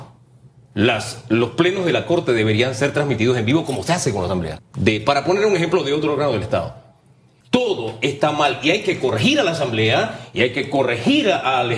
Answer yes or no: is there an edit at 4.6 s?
yes